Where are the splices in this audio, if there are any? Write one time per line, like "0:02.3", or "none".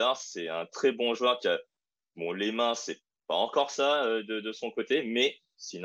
none